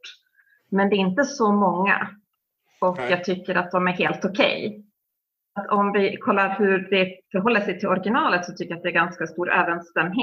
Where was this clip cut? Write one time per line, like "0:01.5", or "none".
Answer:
none

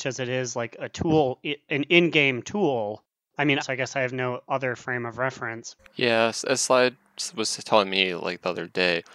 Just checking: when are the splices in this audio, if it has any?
0:03.6
0:05.8

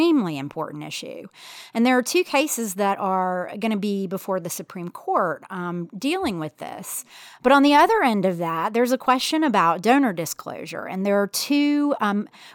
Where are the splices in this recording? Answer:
0:07.3

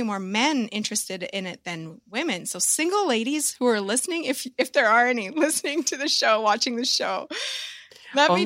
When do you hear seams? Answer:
none

